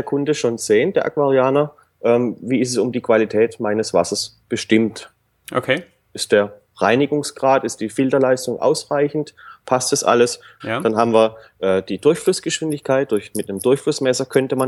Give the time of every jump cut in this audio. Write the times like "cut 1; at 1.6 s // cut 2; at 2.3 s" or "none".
cut 1; at 10.6 s